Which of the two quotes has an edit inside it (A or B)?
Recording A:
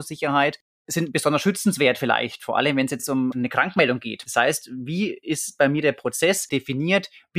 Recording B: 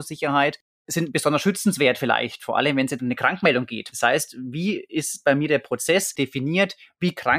B